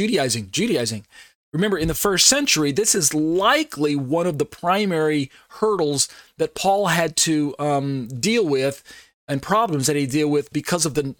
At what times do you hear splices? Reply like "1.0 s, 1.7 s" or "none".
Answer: 1.4 s